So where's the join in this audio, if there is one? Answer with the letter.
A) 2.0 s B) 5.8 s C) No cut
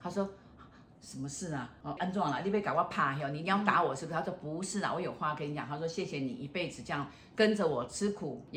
A